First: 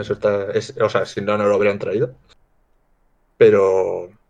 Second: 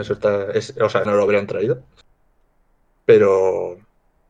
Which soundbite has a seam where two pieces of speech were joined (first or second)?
second